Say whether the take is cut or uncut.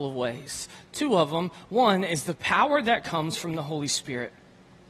uncut